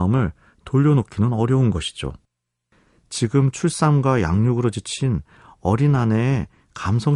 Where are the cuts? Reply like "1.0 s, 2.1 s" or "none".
none